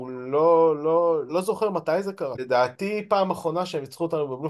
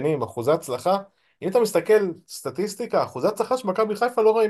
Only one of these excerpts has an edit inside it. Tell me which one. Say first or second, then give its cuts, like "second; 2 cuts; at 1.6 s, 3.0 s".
first; 2 cuts; at 1.3 s, 2.3 s